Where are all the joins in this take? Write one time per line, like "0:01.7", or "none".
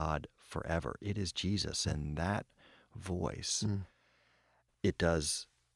0:01.8
0:04.7